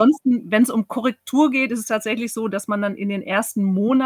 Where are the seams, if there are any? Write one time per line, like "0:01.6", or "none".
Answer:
none